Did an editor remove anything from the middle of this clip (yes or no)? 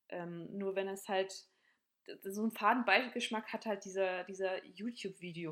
no